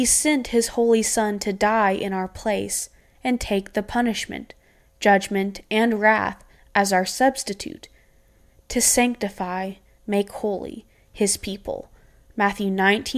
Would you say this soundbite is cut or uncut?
cut